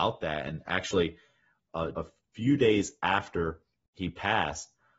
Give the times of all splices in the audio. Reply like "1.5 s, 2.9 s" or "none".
1.9 s